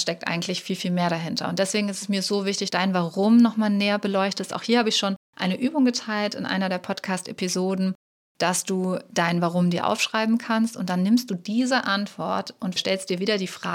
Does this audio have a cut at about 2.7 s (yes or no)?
yes